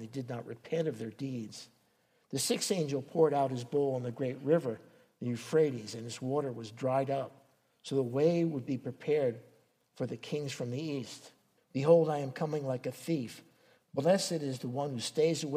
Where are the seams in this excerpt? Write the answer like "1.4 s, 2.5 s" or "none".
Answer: 11.6 s